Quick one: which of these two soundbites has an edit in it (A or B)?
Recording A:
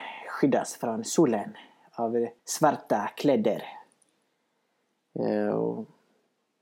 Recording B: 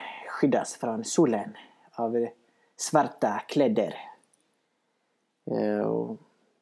A